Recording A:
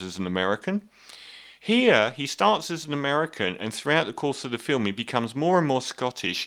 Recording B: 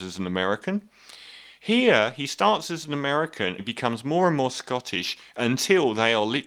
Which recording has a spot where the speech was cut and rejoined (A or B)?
B